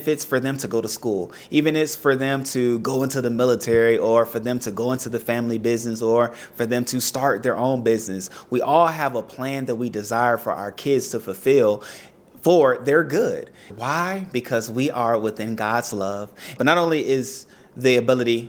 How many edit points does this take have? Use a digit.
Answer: 2